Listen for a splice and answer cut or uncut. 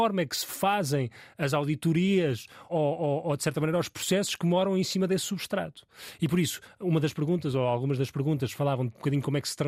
cut